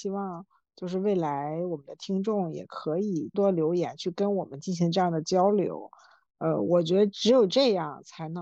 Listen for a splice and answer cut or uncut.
cut